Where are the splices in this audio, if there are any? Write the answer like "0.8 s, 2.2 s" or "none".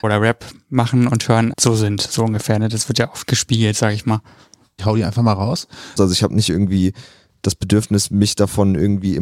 4.8 s, 6.0 s